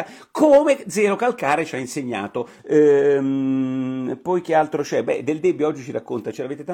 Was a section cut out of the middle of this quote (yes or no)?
yes